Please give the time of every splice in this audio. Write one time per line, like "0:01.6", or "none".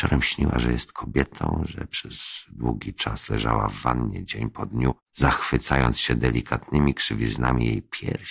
0:05.0